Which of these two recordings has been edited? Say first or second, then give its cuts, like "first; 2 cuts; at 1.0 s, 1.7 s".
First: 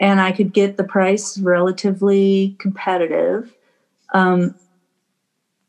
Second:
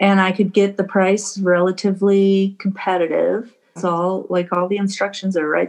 second; 1 cut; at 3.8 s